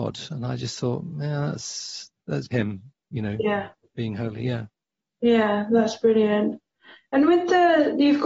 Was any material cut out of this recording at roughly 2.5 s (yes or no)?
yes